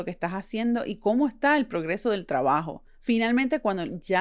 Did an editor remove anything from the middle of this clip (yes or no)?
yes